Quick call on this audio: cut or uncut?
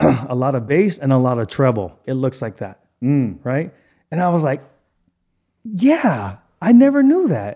cut